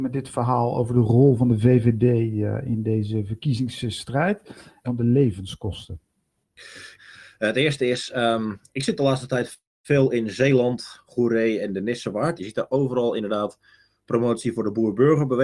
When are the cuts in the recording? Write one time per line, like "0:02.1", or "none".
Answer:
0:04.8
0:07.0
0:12.4